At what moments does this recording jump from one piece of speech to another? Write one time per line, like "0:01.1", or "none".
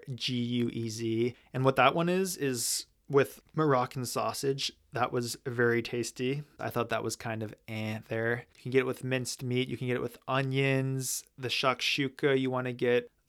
0:06.6
0:08.5